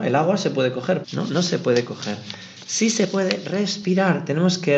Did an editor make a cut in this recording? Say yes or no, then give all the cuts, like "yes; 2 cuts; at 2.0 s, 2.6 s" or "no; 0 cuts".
yes; 1 cut; at 1.0 s